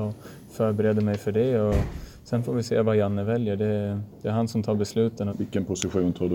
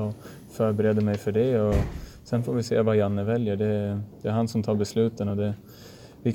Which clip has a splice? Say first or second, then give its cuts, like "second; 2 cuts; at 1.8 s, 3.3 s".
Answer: first; 1 cut; at 5.3 s